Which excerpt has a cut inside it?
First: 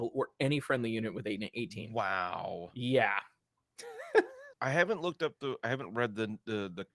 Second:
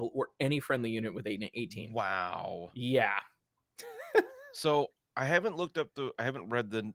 first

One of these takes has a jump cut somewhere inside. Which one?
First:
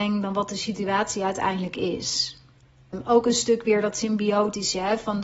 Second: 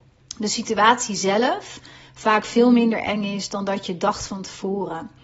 first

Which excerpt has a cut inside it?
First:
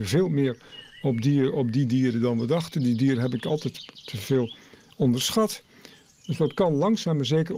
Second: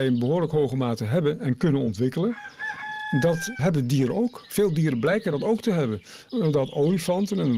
second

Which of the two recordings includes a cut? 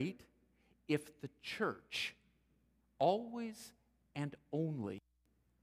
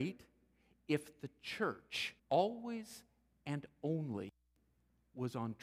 second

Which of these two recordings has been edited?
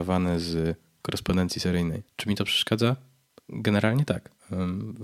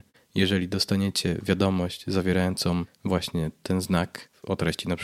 first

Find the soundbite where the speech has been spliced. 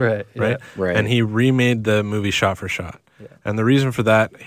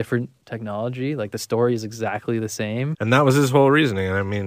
second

